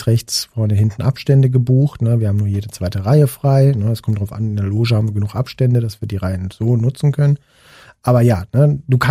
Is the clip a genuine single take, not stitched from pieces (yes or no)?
yes